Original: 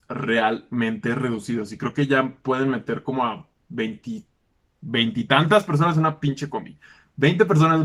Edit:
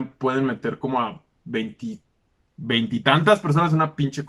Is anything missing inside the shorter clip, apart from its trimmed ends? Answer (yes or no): no